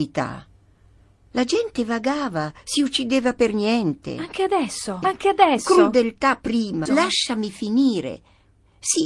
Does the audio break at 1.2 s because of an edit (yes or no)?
no